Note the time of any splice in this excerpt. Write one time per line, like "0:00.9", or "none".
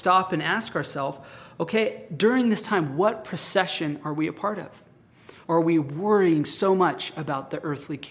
0:05.4